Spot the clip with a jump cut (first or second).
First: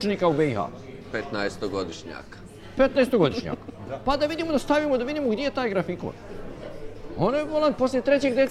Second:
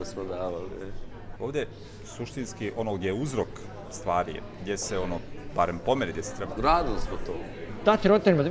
second